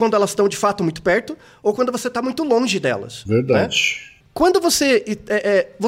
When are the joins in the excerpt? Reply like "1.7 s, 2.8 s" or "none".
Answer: 4.2 s